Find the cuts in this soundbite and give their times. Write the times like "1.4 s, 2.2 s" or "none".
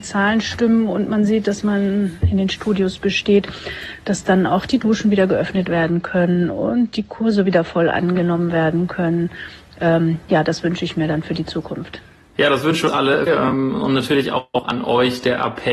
2.2 s, 13.3 s